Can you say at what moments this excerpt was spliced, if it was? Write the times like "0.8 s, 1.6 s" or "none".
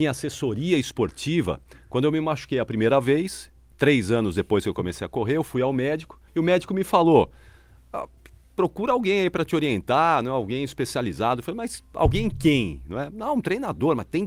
6.3 s